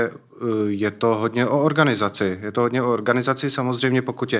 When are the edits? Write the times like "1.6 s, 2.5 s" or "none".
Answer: none